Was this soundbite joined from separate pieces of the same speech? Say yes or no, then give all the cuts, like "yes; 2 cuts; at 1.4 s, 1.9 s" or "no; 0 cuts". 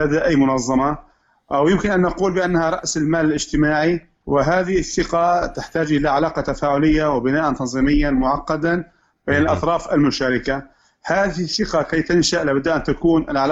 no; 0 cuts